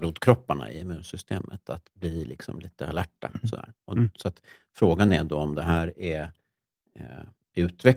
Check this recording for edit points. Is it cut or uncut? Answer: uncut